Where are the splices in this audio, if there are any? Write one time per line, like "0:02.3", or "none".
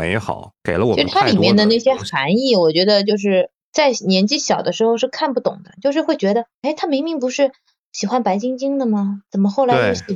none